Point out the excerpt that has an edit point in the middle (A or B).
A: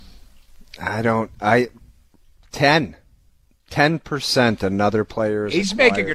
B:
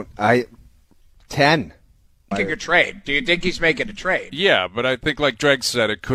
B